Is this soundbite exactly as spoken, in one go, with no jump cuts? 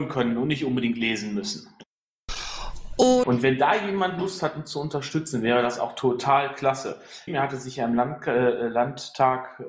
no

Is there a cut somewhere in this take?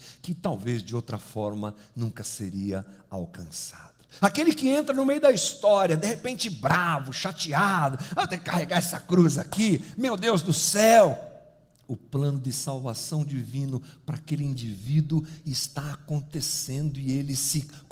yes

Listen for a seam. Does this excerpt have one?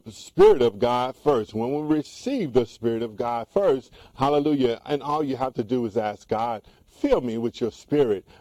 no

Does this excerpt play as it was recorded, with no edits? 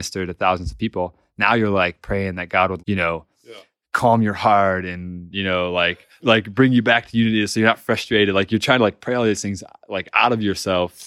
no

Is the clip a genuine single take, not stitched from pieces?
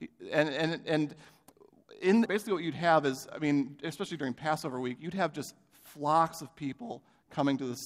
no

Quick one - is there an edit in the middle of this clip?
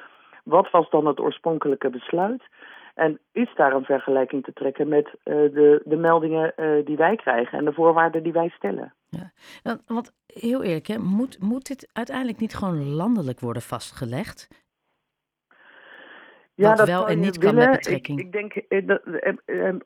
yes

